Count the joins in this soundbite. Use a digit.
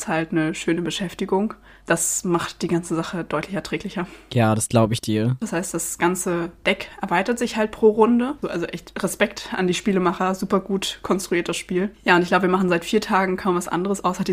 2